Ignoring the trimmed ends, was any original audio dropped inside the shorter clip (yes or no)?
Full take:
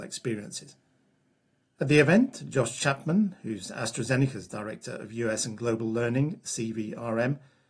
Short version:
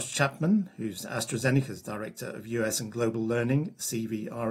no